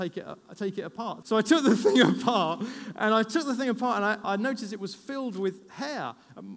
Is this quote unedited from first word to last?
no; 2 cuts; at 1.2 s, 4.2 s

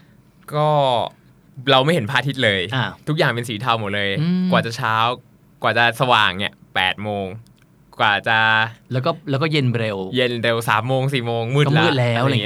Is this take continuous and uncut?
yes; 0 cuts

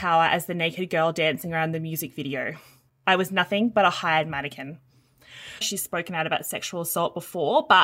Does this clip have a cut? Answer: yes; 1 cut; at 5.6 s

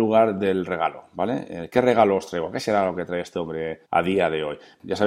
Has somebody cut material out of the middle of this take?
yes; 1 cut; at 3.8 s

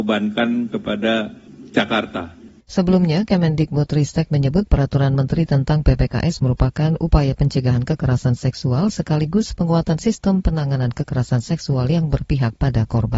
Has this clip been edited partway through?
yes; 1 cut; at 2.6 s

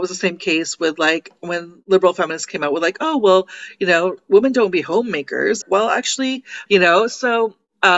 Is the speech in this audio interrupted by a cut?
yes; 2 cuts; at 5.6 s, 6.7 s

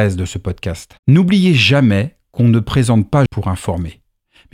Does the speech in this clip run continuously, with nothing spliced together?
no; 2 cuts; at 1.0 s, 3.3 s

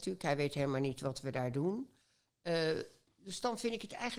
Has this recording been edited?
no; 0 cuts

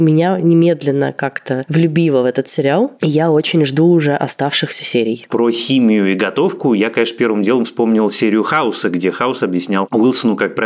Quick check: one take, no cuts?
yes; 0 cuts

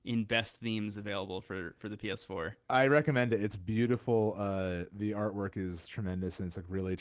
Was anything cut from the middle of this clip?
no; 0 cuts

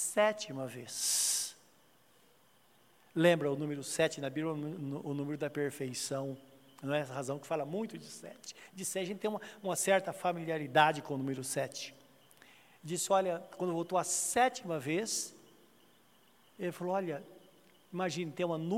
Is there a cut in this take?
no; 0 cuts

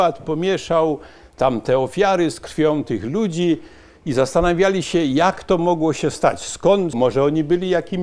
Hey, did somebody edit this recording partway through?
yes; 1 cut; at 6.9 s

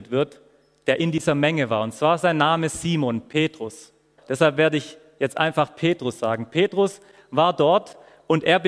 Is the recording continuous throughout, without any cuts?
no; 1 cut; at 4.2 s

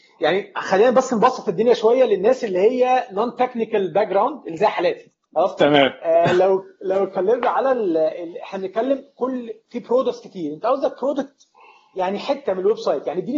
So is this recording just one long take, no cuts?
yes; 0 cuts

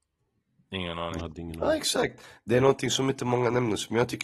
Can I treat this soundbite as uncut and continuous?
yes; 0 cuts

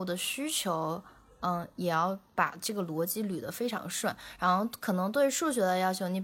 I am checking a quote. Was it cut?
no; 0 cuts

